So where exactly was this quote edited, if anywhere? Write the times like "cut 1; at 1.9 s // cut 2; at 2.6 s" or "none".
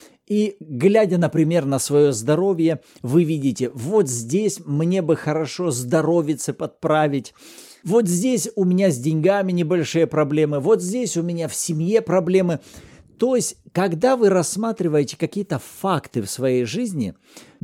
none

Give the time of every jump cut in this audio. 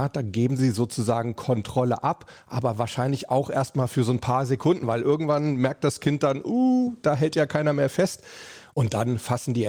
none

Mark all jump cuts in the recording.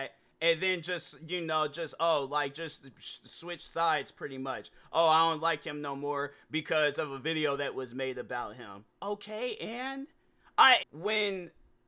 cut 1; at 10.8 s

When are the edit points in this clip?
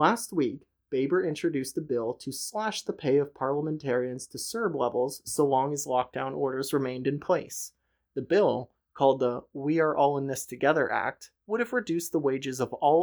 cut 1; at 11.4 s

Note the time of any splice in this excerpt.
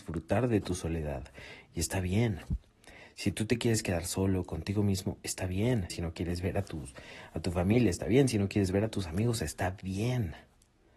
cut 1; at 5.9 s

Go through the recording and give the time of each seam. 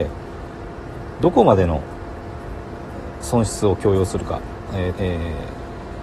cut 1; at 4.9 s

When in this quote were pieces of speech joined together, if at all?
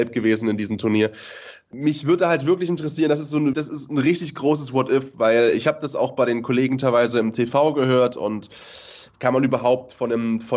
cut 1; at 1.7 s // cut 2; at 3.5 s

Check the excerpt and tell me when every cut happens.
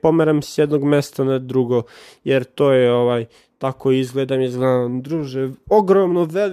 none

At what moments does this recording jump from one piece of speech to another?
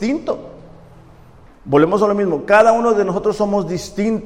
cut 1; at 1.5 s

